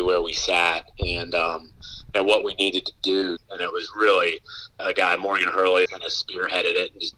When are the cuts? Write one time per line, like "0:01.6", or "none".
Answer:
0:03.4
0:04.8
0:05.9